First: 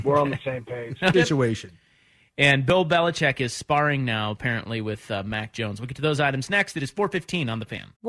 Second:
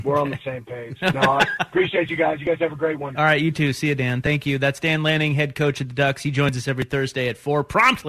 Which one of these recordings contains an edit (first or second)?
first